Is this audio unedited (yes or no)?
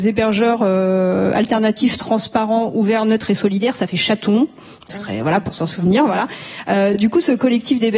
yes